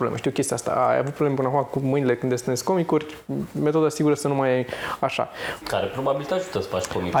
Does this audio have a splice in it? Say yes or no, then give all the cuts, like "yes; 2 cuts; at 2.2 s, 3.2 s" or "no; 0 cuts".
yes; 1 cut; at 5.6 s